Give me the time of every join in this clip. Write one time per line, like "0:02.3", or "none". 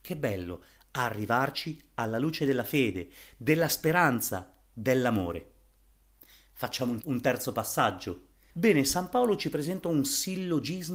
0:07.0
0:08.5